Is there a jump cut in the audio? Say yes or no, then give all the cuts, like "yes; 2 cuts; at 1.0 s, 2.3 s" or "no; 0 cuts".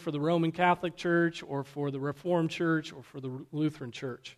no; 0 cuts